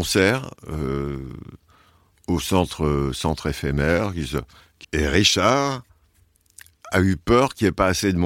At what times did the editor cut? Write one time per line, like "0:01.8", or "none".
0:04.8